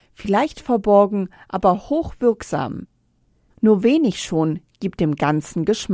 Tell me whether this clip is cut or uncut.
cut